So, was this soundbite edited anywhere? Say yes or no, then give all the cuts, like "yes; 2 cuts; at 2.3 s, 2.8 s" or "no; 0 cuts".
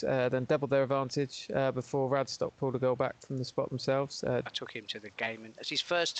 yes; 1 cut; at 4.5 s